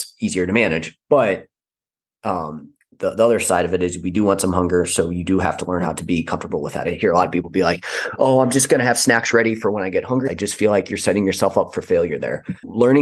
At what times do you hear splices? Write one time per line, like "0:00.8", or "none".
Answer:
0:06.8
0:10.2